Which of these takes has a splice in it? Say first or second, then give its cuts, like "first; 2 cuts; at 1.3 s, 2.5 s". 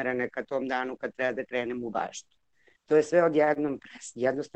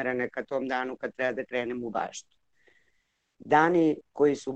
first; 1 cut; at 2.8 s